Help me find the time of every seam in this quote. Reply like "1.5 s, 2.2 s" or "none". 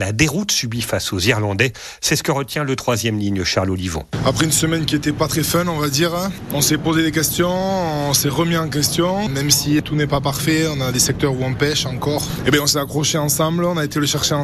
none

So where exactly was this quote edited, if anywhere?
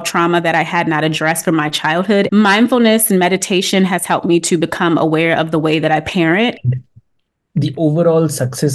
2.3 s, 6.6 s

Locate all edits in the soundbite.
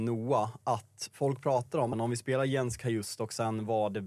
1.9 s

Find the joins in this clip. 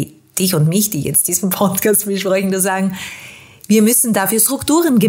none

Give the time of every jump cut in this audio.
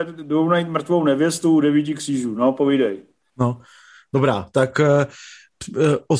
none

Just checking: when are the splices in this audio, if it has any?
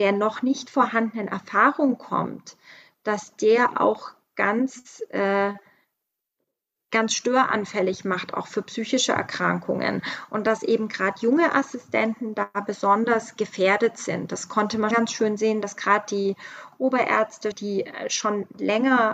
14.9 s, 17.5 s

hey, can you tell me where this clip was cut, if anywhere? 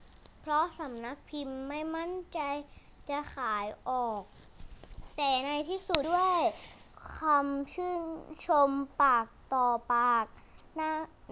6.0 s

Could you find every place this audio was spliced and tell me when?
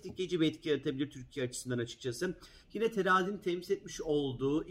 2.6 s

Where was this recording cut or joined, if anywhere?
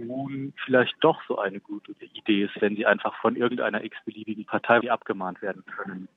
3.2 s, 4.8 s

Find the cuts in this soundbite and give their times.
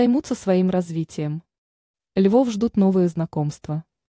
2.0 s

